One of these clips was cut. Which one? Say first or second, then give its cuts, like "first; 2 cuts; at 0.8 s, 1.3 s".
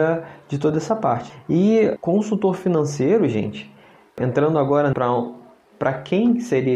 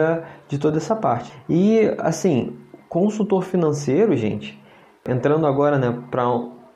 first; 2 cuts; at 2.0 s, 4.9 s